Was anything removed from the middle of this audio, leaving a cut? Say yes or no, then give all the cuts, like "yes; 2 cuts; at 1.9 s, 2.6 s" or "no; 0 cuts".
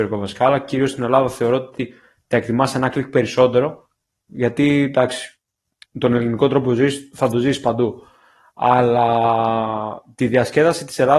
no; 0 cuts